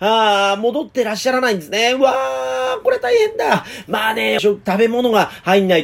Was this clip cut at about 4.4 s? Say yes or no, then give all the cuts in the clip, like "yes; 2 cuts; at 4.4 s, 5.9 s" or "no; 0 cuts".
yes; 1 cut; at 4.4 s